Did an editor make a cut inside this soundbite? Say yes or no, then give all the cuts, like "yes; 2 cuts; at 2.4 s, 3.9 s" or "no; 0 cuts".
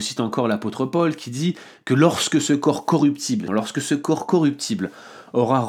yes; 1 cut; at 3.5 s